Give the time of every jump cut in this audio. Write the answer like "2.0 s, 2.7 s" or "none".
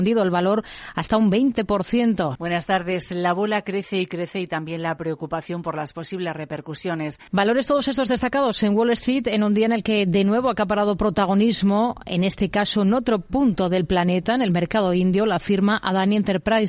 2.4 s, 7.3 s